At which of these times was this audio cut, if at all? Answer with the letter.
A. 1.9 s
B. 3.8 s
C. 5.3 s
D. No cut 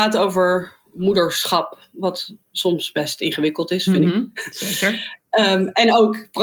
D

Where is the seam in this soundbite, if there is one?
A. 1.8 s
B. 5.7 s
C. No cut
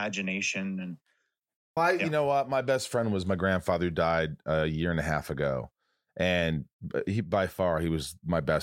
A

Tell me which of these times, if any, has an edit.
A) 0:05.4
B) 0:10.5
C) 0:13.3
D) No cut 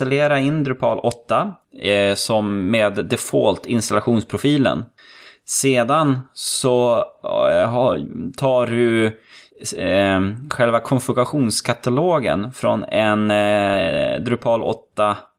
D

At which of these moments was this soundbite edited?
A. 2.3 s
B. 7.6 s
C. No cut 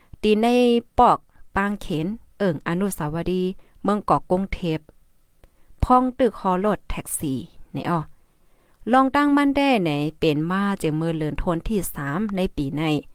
A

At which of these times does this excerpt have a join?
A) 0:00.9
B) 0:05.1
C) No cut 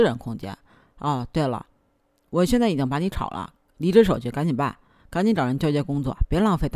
C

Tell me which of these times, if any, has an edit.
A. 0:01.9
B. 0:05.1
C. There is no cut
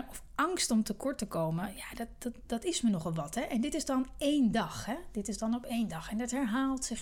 C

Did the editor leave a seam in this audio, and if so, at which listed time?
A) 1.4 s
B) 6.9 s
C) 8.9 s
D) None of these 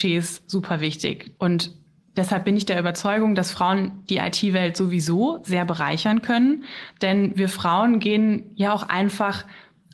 A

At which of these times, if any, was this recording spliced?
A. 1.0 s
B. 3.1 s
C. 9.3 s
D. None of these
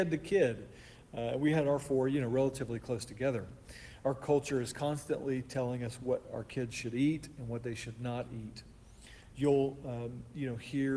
D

